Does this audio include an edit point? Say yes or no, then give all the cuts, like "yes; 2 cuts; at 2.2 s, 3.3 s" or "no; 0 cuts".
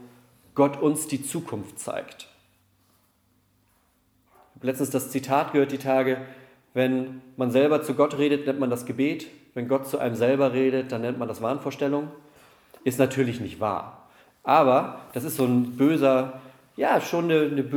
no; 0 cuts